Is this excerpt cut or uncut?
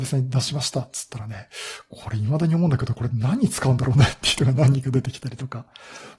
uncut